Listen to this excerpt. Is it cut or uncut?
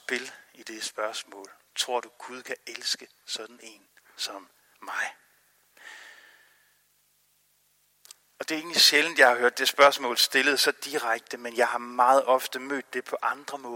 uncut